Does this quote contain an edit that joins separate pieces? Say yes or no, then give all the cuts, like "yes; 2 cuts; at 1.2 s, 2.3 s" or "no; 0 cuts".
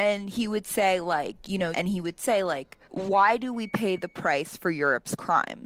yes; 2 cuts; at 1.7 s, 2.8 s